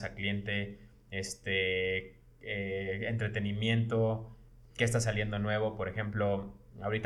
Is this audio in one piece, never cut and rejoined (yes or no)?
yes